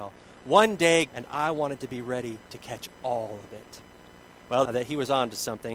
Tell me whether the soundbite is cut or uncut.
cut